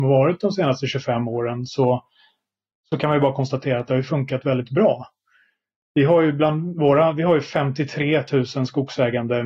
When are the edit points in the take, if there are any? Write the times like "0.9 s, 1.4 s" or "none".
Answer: none